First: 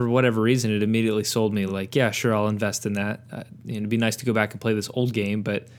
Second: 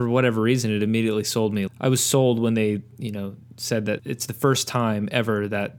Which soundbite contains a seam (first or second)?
second